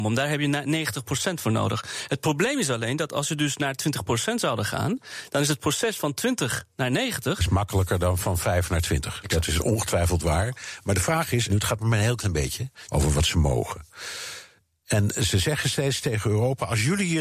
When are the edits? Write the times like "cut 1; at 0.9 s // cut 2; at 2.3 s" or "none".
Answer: cut 1; at 11.5 s // cut 2; at 12.9 s